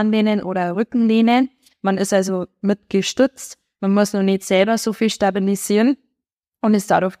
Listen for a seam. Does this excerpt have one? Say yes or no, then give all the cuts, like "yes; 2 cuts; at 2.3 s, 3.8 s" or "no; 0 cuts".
no; 0 cuts